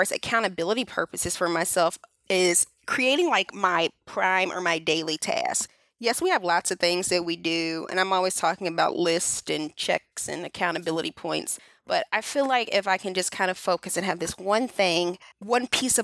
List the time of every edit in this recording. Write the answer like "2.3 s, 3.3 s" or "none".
none